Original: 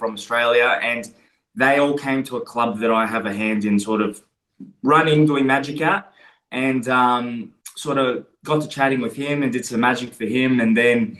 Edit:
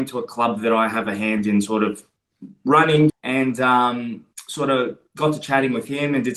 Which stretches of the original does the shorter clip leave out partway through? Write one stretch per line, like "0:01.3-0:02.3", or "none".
0:05.3-0:06.4